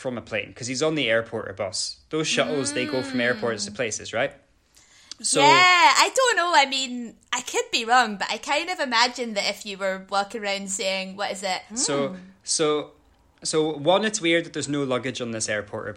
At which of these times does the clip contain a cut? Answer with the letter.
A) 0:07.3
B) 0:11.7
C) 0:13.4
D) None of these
B